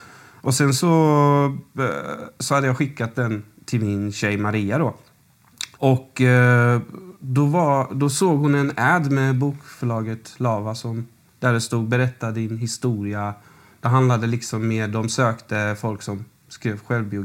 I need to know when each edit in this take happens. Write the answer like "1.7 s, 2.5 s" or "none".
5.7 s